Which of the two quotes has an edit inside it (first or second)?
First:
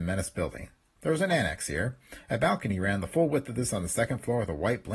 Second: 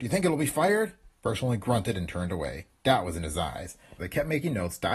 second